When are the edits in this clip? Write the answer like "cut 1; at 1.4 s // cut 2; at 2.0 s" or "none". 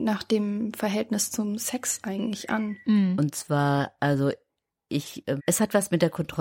cut 1; at 2.8 s // cut 2; at 5.4 s